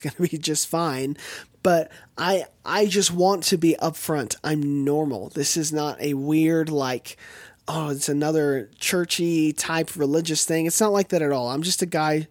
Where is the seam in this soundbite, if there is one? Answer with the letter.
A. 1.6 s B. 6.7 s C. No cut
C